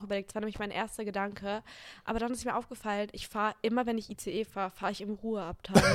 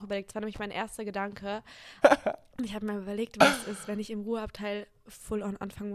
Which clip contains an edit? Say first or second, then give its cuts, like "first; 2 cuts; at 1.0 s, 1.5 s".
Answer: second; 1 cut; at 2.0 s